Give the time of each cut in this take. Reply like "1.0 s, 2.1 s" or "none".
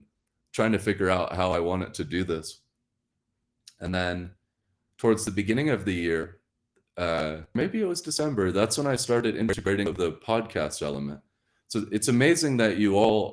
none